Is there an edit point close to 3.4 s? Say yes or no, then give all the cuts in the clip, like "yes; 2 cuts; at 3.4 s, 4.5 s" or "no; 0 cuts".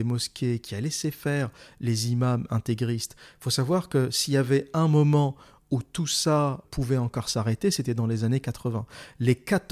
no; 1 cut; at 6.6 s